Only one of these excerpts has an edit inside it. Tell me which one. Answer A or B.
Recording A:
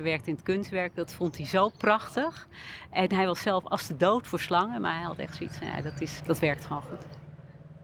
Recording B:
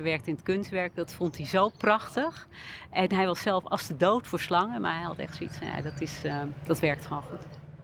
A